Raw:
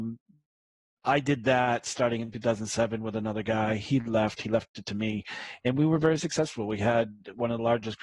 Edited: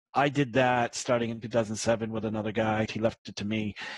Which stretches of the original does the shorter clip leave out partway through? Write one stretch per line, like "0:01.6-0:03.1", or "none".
0:03.8-0:04.4